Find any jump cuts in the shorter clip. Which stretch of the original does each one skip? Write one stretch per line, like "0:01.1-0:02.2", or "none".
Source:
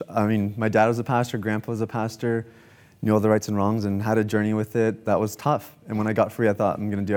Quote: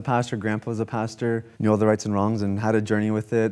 0:02.5-0:03.0